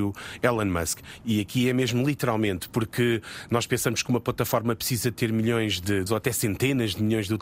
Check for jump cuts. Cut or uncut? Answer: cut